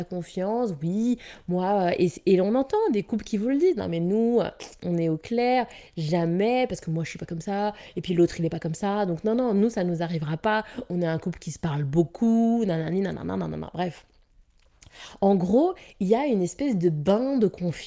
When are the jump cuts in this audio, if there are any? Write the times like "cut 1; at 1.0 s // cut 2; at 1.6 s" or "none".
none

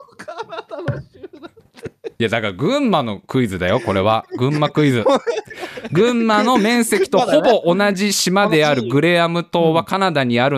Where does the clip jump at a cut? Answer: cut 1; at 2.1 s

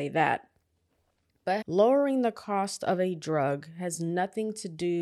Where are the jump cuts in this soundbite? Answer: cut 1; at 1.6 s

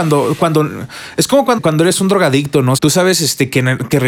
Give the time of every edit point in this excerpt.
cut 1; at 1.6 s // cut 2; at 2.8 s

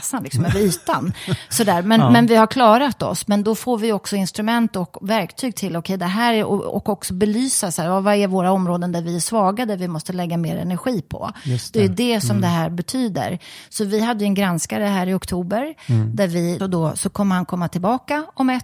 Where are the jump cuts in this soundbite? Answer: cut 1; at 16.6 s

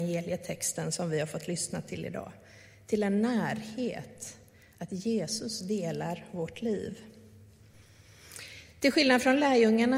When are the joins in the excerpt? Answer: none

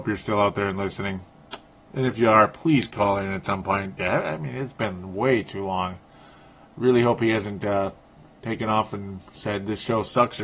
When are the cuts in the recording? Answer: cut 1; at 4.0 s

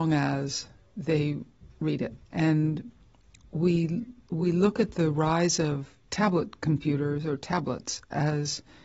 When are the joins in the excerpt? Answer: cut 1; at 2.2 s // cut 2; at 6.0 s

